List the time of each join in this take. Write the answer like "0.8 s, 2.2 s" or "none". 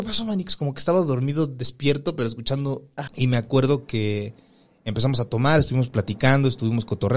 3.1 s